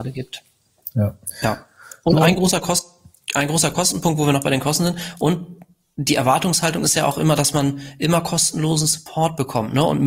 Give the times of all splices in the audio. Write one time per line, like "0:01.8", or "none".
none